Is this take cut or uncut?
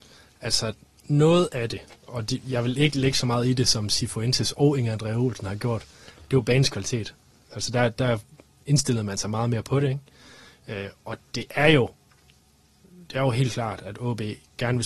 cut